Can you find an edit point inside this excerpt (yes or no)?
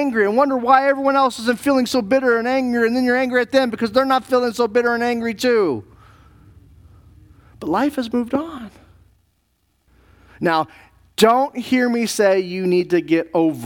no